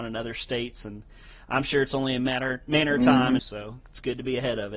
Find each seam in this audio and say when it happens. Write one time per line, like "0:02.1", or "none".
0:03.4